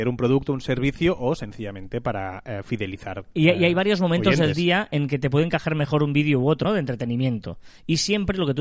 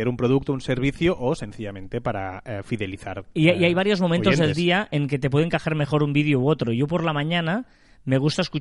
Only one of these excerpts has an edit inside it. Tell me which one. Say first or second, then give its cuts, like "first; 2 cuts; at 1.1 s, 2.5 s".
first; 1 cut; at 6.6 s